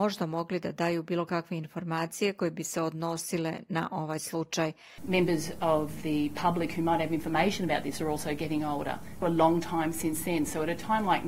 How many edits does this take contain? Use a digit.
2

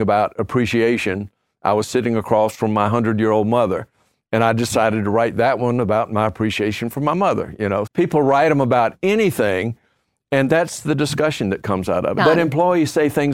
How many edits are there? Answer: 2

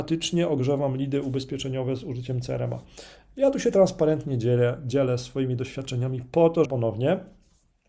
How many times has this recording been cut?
1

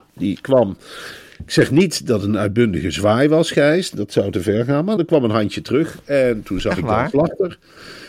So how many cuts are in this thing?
1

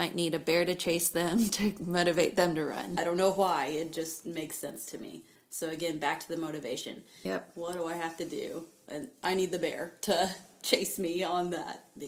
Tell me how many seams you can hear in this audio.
2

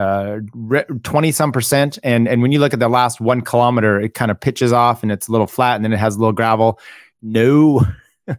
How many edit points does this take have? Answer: 1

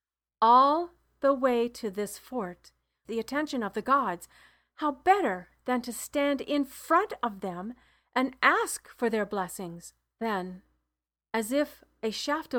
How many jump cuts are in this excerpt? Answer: 2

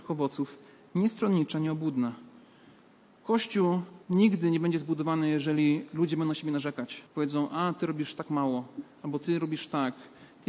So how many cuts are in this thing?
2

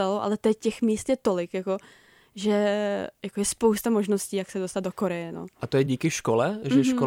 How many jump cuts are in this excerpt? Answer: 1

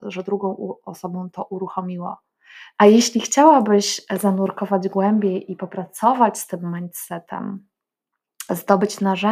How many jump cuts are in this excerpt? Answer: 1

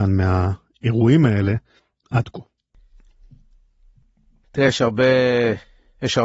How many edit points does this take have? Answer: 0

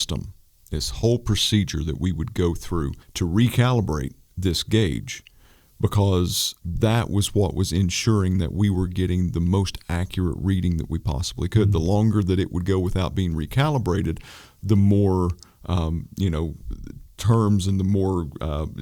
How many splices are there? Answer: 1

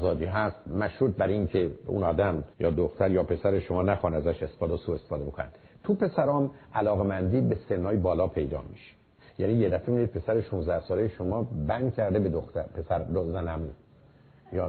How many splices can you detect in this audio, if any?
1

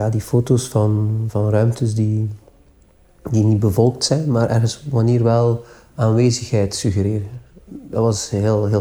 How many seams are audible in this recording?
1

